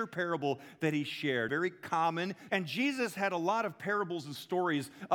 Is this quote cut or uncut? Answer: cut